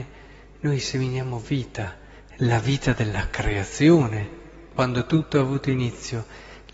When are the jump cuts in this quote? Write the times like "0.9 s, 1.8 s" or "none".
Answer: none